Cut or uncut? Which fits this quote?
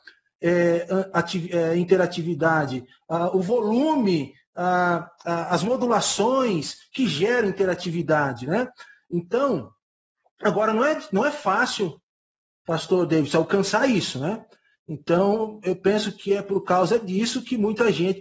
uncut